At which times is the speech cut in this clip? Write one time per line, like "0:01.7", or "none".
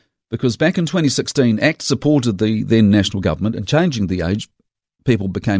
none

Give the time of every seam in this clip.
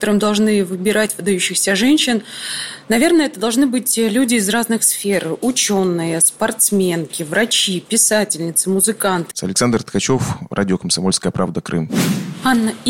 0:09.3

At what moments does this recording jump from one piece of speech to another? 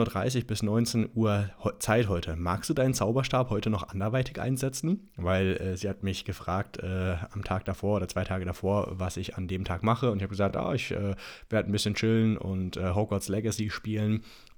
none

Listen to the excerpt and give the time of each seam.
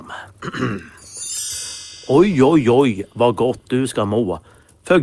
none

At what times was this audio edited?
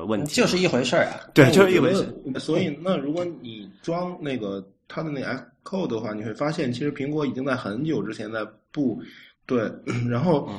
0:02.3
0:09.3

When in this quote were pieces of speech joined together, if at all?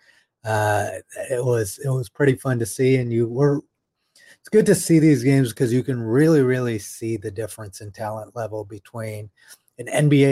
none

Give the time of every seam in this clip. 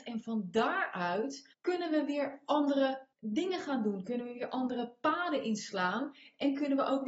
0:01.5
0:03.1

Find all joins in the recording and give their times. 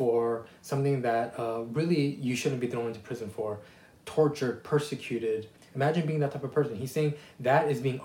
0:05.6

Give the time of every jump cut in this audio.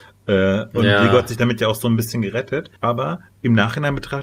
0:02.8

